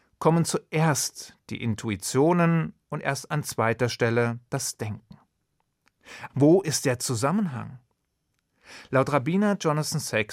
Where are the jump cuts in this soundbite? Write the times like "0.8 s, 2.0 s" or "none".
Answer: 6.3 s